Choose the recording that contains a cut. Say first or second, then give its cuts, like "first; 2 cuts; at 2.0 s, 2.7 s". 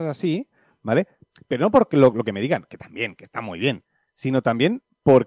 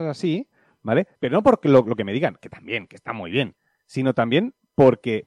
second; 1 cut; at 1.1 s